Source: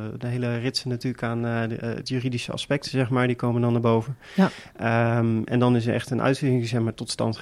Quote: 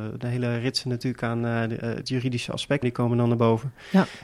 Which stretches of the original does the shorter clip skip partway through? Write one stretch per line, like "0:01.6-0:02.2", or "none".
0:02.8-0:03.3